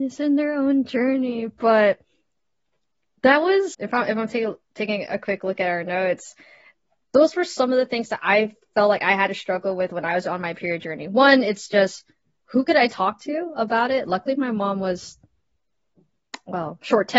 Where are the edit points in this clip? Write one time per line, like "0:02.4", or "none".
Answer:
0:03.7